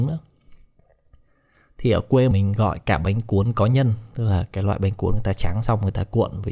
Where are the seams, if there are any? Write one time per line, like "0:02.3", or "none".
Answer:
0:02.3

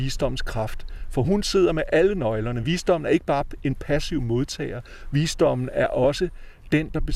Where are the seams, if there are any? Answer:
none

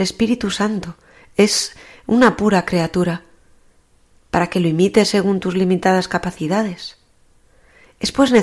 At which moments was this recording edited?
none

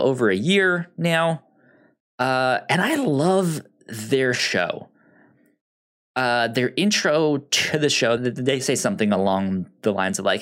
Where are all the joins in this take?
0:08.2

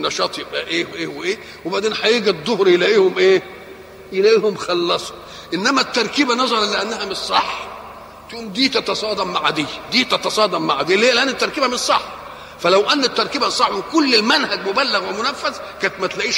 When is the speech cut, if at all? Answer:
0:00.9

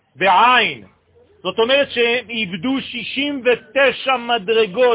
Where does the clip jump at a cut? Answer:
none

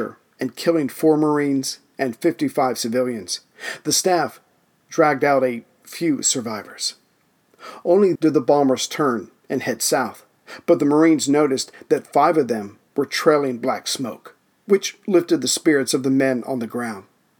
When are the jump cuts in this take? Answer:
0:08.2
0:12.9

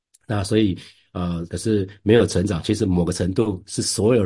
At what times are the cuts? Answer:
0:01.5

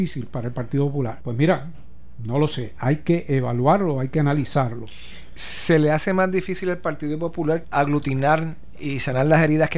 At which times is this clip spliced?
0:01.2
0:07.6

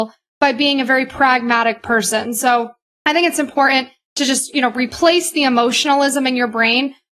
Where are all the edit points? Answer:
none

